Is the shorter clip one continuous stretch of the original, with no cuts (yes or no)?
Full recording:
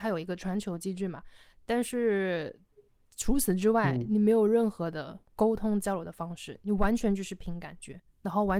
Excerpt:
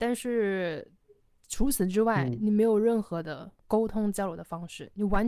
yes